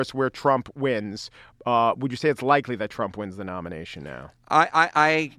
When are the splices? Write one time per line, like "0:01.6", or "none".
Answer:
none